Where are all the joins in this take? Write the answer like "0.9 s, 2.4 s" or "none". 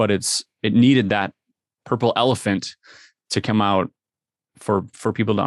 none